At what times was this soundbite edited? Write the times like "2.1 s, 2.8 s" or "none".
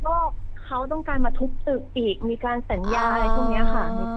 none